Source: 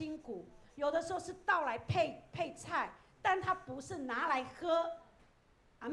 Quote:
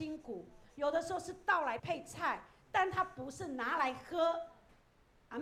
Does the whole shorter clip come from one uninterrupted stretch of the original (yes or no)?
no